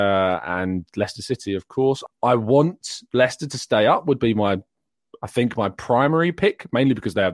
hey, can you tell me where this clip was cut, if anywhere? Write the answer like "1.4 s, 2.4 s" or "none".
2.1 s